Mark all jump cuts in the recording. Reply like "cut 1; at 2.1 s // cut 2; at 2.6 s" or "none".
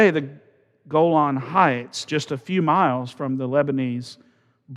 none